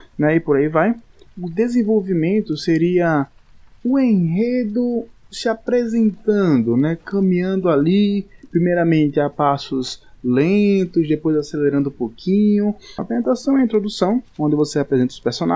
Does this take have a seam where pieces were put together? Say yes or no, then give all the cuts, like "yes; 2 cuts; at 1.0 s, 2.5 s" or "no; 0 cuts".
yes; 1 cut; at 13.0 s